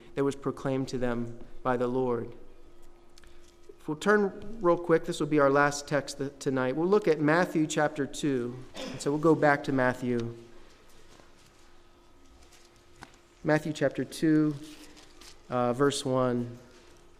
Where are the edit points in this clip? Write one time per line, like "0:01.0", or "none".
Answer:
0:08.7